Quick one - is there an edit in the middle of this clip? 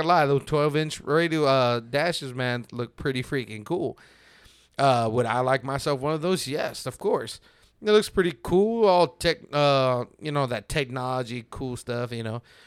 no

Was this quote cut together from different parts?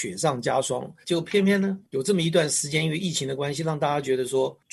yes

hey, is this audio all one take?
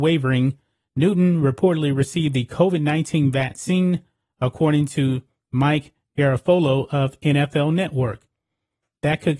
yes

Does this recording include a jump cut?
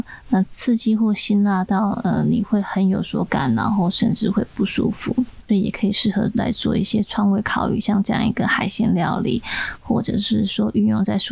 yes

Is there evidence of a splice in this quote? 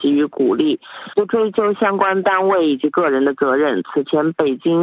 no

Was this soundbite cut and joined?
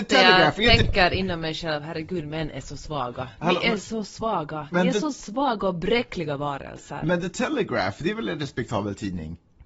no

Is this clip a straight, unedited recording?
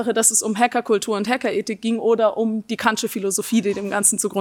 yes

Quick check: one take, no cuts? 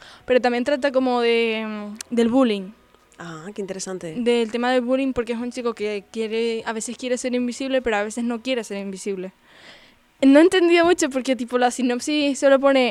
yes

